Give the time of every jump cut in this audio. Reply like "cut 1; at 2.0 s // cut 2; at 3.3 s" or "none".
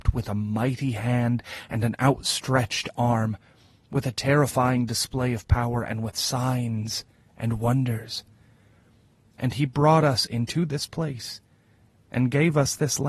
none